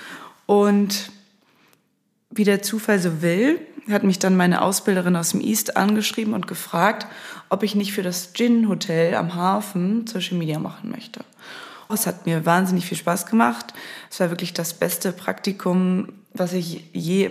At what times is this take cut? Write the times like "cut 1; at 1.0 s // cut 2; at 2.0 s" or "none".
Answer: cut 1; at 11.9 s